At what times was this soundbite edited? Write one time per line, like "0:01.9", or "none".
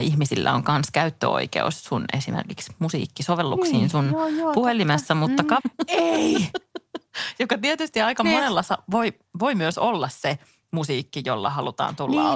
0:05.6